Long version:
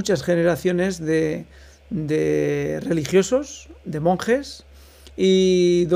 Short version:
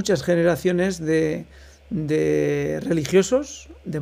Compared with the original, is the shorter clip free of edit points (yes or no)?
yes